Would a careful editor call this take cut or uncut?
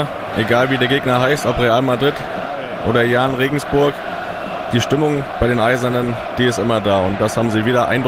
uncut